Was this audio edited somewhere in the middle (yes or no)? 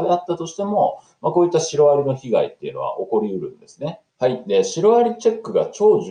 yes